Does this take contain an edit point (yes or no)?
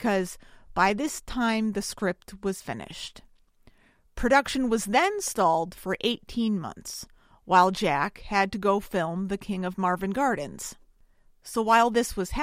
no